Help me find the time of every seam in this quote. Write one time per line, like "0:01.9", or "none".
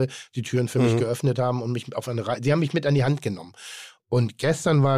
none

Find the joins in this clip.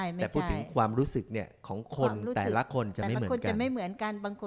none

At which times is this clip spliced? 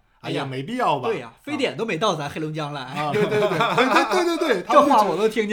0:03.1

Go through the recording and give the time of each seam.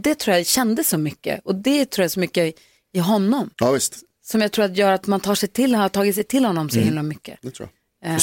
0:03.5

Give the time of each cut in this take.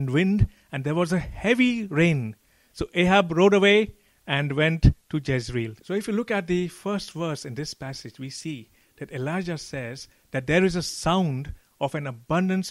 0:05.8

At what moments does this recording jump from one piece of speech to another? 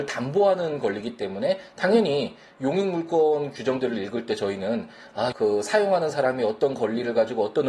0:05.3

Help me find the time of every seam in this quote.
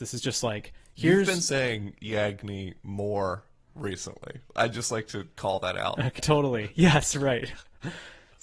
0:06.2

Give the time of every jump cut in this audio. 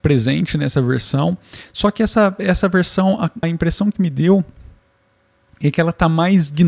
0:03.4

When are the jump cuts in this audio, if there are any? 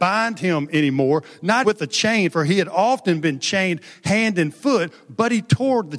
0:01.6

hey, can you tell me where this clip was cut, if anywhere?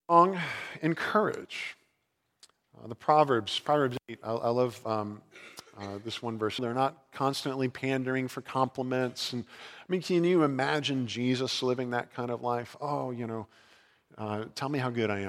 0:06.6

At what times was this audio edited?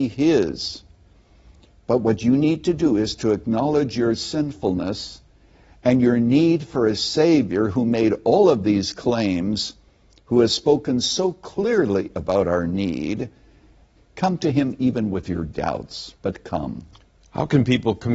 0:14.0
0:16.2

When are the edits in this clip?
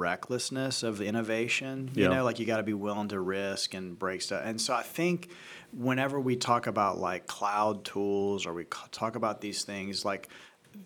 none

